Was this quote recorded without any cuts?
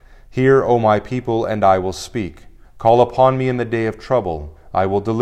no; 1 cut; at 2.6 s

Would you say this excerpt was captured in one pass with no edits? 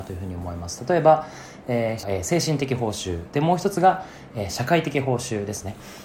no; 1 cut; at 2.0 s

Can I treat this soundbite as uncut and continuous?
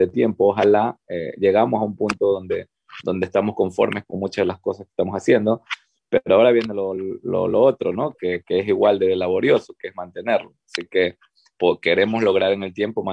yes; 0 cuts

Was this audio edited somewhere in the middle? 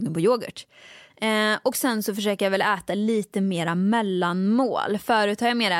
yes; 1 cut; at 1.1 s

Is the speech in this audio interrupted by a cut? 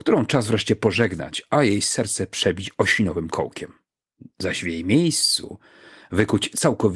no; 0 cuts

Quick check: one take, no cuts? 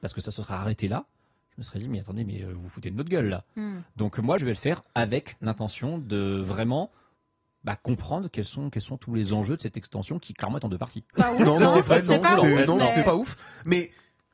no; 3 cuts; at 4.4 s, 11.1 s, 13.0 s

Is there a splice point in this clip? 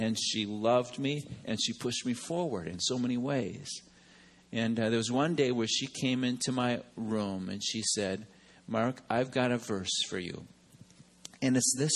no; 0 cuts

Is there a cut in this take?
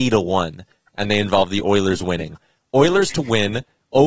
no; 0 cuts

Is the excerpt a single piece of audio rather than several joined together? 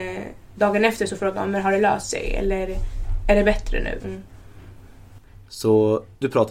no; 1 cut; at 4.0 s

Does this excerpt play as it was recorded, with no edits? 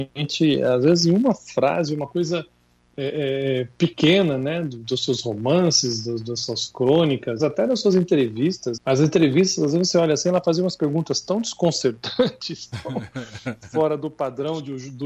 no; 2 cuts; at 7.4 s, 8.8 s

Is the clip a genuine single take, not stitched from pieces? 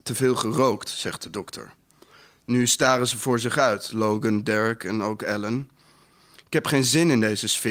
yes; 0 cuts

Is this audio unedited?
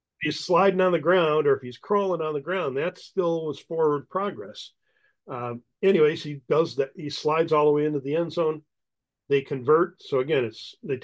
no; 1 cut; at 5.7 s

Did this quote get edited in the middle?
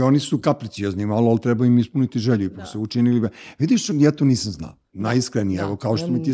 no; 0 cuts

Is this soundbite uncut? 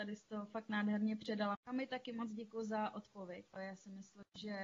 no; 2 cuts; at 1.5 s, 3.5 s

